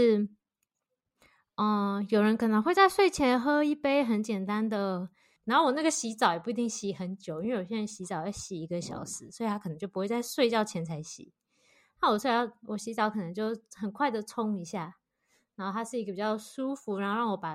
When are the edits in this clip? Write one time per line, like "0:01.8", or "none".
0:05.4